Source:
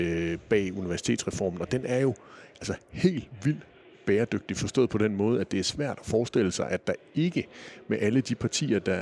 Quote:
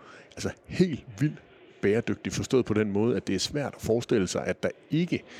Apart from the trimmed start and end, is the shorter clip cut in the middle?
no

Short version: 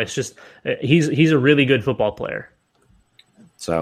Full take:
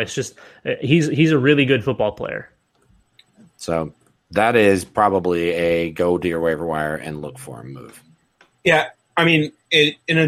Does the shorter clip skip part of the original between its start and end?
no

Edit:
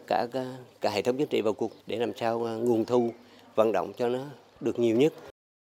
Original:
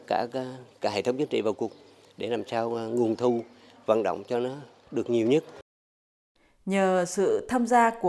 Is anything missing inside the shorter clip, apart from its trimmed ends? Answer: yes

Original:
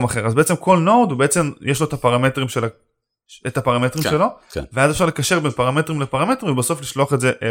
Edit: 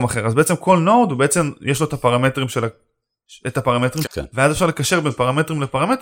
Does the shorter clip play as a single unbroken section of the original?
no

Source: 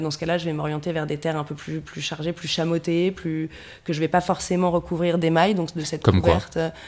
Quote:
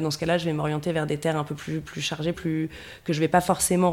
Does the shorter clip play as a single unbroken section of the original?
no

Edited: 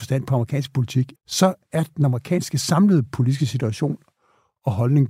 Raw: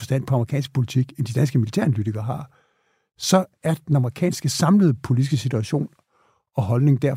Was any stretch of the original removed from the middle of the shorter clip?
yes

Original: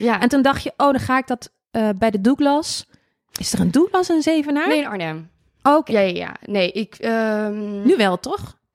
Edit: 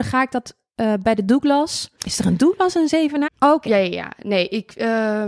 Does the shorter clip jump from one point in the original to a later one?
yes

